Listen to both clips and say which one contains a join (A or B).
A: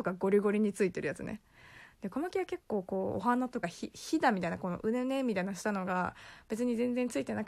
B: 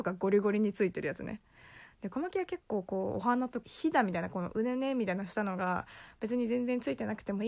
B